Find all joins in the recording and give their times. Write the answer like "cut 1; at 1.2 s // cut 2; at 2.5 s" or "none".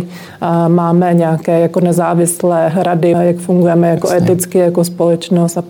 cut 1; at 3.1 s